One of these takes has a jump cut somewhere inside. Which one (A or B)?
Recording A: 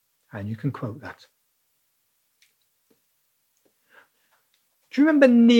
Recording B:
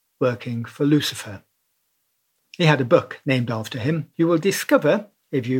B